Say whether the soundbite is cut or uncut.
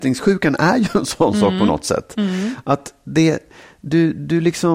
uncut